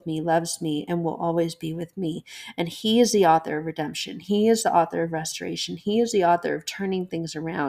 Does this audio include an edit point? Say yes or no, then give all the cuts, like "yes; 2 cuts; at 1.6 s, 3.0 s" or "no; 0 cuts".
no; 0 cuts